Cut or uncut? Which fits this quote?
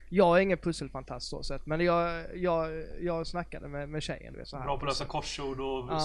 cut